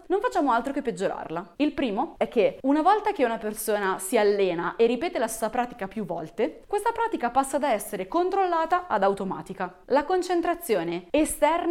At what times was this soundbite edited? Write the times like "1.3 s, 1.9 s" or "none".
1.6 s, 9.8 s

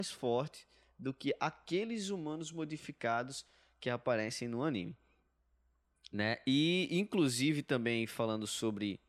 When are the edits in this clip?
none

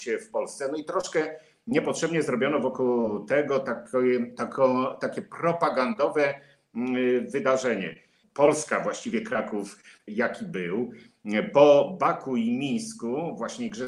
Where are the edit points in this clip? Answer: 8.2 s, 10.1 s

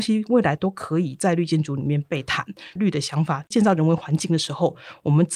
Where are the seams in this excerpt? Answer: 2.8 s

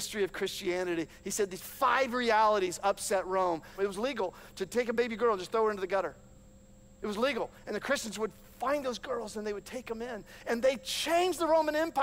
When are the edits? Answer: 3.8 s

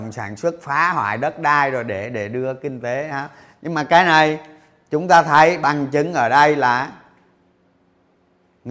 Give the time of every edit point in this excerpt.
none

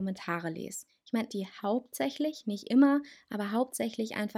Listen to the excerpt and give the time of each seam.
1.3 s

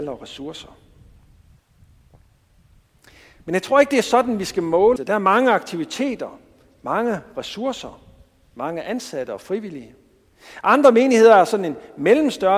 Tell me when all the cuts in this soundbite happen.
5.0 s

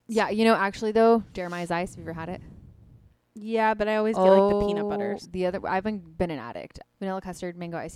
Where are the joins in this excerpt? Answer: 5.2 s, 6.8 s

